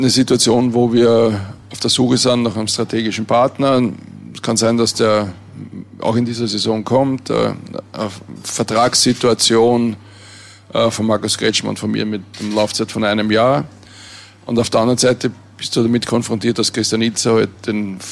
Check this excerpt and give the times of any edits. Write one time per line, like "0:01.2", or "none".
none